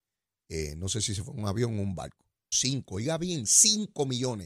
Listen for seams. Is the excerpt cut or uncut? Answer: cut